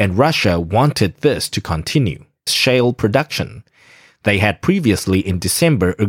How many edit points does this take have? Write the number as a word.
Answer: one